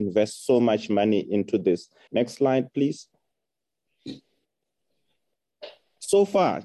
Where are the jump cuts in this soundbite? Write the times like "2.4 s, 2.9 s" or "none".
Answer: 2.1 s